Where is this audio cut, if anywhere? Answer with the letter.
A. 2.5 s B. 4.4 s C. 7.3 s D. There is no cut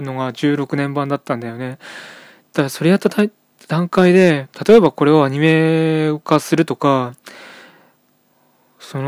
D